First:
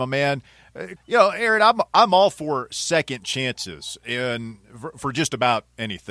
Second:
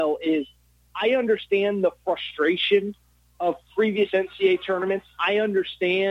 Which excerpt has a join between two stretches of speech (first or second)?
first